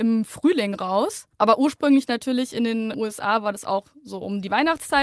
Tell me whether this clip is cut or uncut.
cut